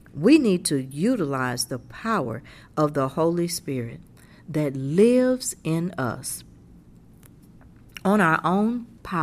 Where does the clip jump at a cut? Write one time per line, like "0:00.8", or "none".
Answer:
none